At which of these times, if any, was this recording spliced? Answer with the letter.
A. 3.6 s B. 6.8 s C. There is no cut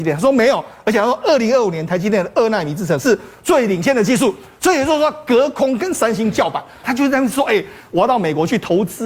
B